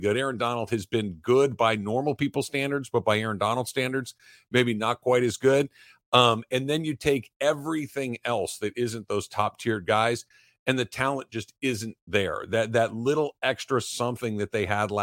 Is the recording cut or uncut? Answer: uncut